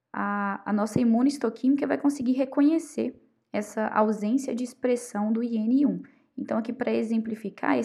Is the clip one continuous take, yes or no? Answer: yes